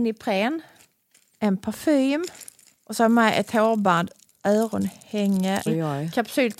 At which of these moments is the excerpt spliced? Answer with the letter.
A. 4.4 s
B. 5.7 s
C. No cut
B